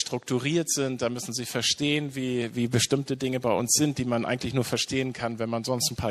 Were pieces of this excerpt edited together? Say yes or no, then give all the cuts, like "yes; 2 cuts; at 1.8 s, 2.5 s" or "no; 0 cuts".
no; 0 cuts